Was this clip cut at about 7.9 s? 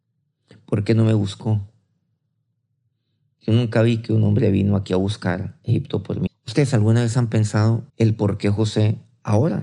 yes; 2 cuts; at 6.3 s, 7.9 s

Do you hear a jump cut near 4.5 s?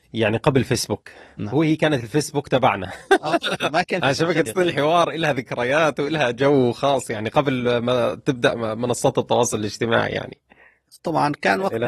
yes; 1 cut; at 4.5 s

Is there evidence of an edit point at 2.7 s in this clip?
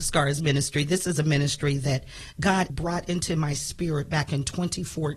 yes; 1 cut; at 2.7 s

